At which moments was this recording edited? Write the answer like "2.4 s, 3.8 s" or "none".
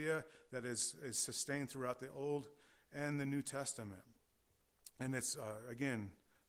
none